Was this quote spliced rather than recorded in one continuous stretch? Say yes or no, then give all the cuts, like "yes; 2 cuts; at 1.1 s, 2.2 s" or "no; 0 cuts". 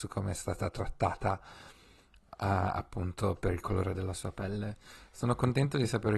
no; 0 cuts